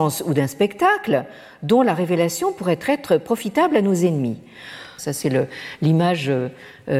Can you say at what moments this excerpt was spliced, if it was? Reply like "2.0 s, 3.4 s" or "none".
5.0 s